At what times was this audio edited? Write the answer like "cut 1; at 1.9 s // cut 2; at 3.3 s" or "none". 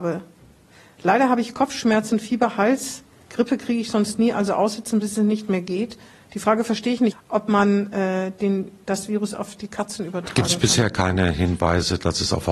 cut 1; at 7.1 s